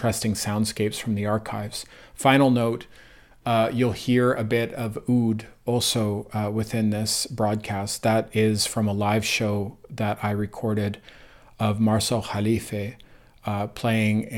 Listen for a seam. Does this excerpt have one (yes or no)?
no